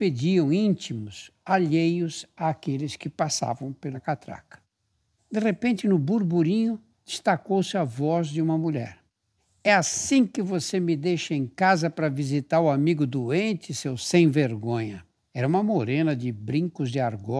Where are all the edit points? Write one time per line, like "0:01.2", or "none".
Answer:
none